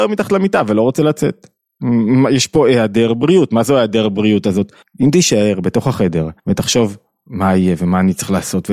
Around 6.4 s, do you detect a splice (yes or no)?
yes